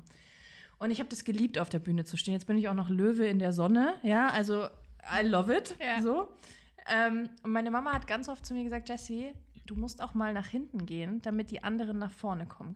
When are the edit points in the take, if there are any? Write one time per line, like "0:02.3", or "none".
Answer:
none